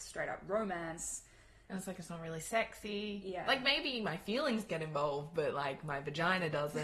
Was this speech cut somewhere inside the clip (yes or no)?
no